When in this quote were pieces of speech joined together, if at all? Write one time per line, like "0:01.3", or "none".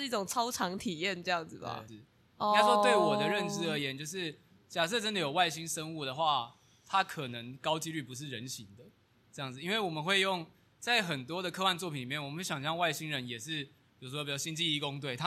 0:01.9